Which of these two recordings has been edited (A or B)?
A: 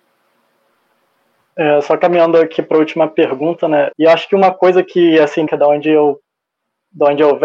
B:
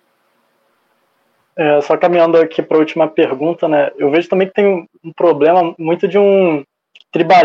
A